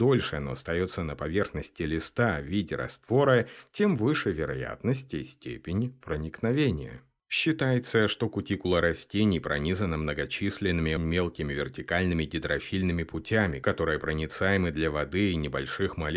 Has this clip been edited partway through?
yes; 1 cut; at 11.0 s

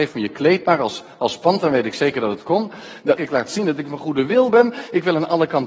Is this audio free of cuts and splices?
no; 1 cut; at 3.2 s

